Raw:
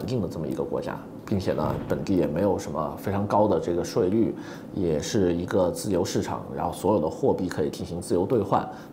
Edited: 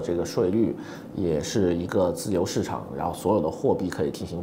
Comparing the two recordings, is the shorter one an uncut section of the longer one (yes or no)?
yes